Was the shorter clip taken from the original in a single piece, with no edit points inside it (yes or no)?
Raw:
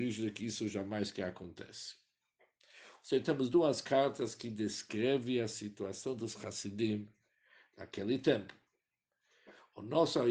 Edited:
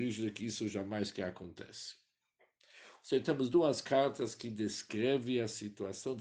yes